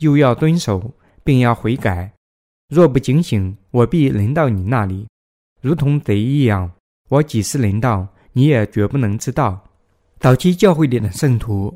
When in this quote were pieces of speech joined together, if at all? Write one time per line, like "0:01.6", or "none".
none

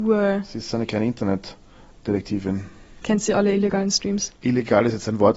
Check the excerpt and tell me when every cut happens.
0:04.4

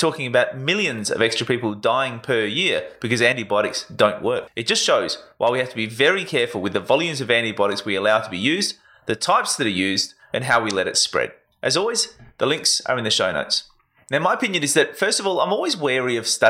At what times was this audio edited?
none

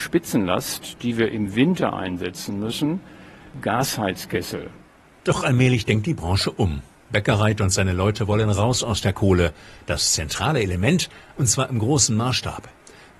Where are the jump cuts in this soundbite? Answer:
0:09.8
0:11.3

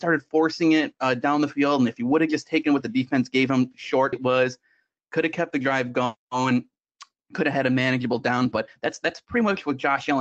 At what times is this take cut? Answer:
0:04.1

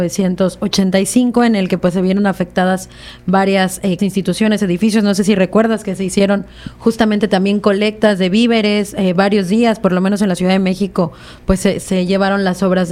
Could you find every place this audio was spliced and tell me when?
0:04.0

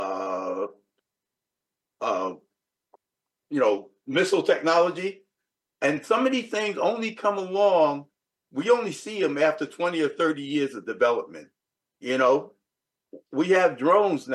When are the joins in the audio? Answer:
none

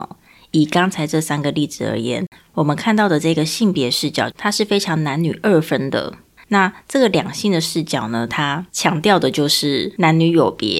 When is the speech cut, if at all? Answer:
0:06.4

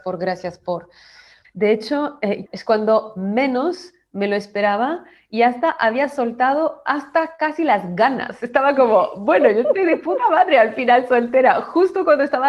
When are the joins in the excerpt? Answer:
0:01.4
0:02.5

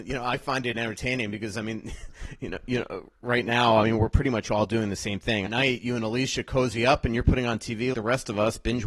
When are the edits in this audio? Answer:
0:05.5
0:07.9

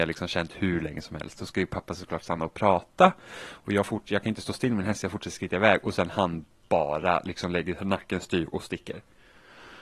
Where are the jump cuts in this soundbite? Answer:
none

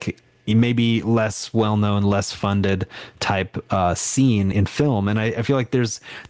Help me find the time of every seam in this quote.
0:04.5

